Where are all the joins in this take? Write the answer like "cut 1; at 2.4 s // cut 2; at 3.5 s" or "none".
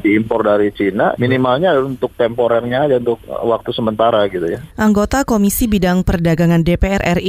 cut 1; at 1.2 s